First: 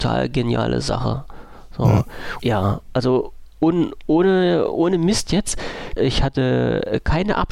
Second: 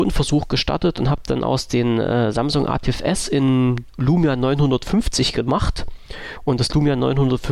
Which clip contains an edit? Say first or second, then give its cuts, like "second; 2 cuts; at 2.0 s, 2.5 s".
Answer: first; 2 cuts; at 2.4 s, 6.0 s